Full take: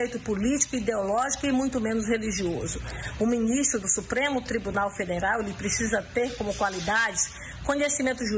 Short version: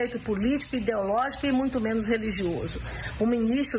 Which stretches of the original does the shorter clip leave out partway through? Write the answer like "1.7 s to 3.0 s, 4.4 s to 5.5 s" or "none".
none